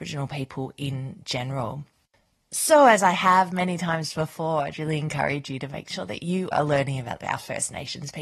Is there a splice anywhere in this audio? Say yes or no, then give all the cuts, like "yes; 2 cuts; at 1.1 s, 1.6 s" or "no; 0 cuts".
yes; 2 cuts; at 4.7 s, 6.5 s